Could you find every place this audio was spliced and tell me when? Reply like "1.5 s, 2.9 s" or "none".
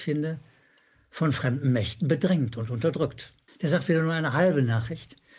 3.5 s

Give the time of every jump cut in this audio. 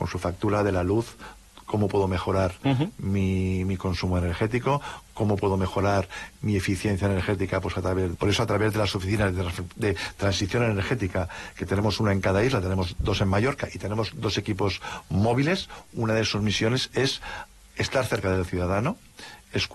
8.2 s

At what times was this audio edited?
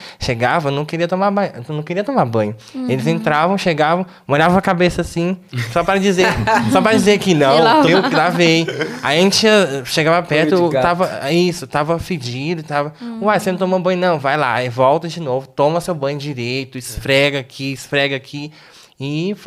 7.9 s

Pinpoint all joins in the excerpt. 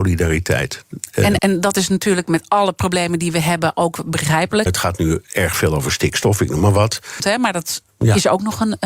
1.4 s, 4.7 s, 7.2 s

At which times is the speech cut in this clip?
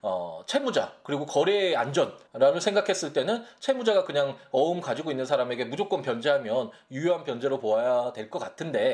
2.3 s

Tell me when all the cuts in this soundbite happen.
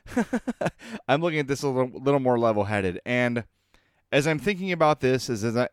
3.0 s

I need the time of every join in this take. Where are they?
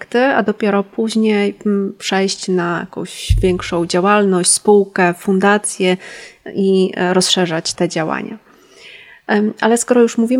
7.7 s

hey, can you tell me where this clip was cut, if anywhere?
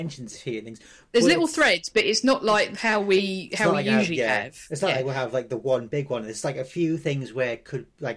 none

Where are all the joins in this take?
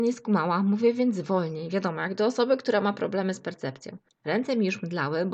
4.1 s

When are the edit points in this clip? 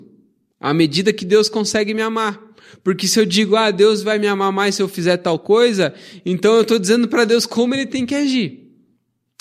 none

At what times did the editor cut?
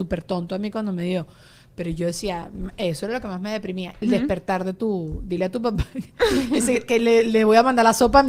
4.0 s

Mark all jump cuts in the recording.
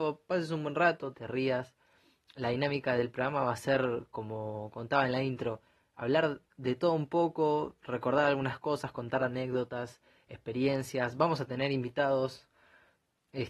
1.1 s

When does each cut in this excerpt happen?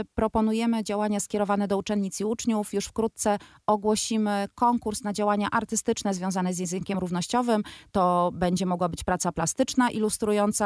none

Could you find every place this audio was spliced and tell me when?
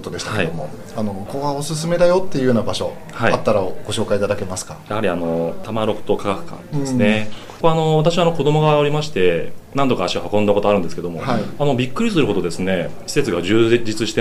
1.3 s

